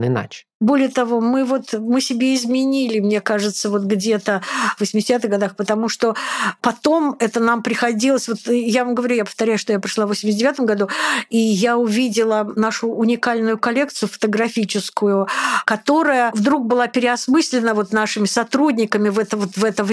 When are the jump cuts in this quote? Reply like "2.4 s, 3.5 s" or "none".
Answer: 4.8 s